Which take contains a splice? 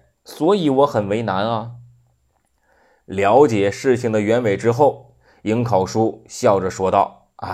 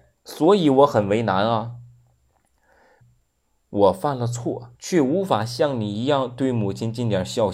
second; 2 cuts; at 3.0 s, 4.7 s

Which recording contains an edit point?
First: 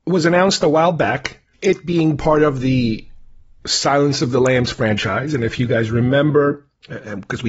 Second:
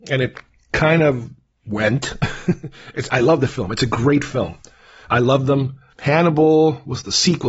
second; 2 cuts; at 3.1 s, 5.0 s

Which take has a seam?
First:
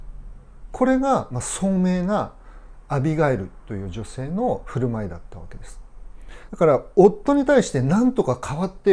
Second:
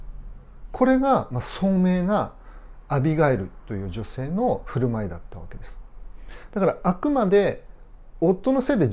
first; 1 cut; at 6.5 s

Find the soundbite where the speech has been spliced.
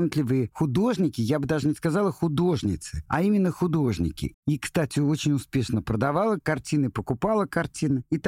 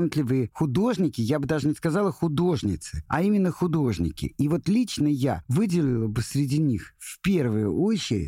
first; 1 cut; at 4.3 s

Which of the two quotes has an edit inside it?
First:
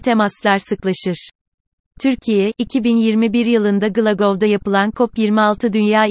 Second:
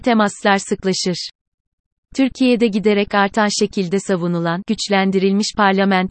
second; 1 cut; at 1.9 s

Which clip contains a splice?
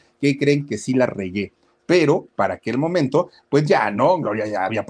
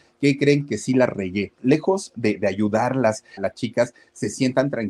second; 2 cuts; at 1.6 s, 3.4 s

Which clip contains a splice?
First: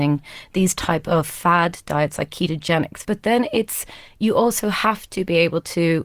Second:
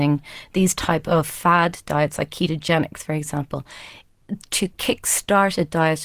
first; 1 cut; at 3.0 s

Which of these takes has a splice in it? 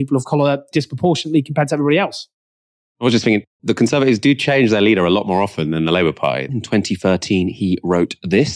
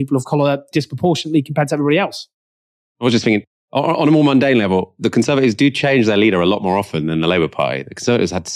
first; 2 cuts; at 3.6 s, 6.5 s

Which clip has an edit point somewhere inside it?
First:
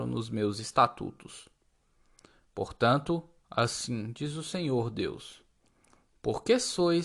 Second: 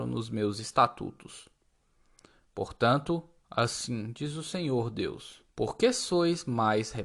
second; 1 cut; at 5.5 s

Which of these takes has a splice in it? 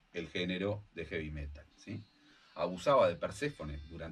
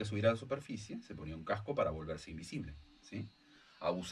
first; 1 cut; at 1.7 s

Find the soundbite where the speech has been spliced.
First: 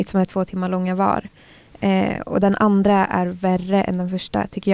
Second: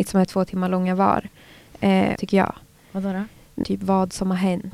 second; 2 cuts; at 2.1 s, 3.6 s

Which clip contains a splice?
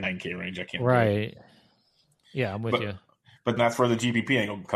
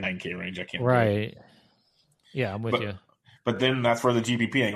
first; 1 cut; at 3.6 s

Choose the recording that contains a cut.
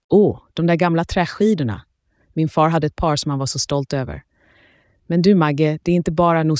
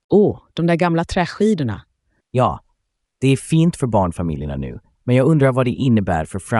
second; 1 cut; at 2.2 s

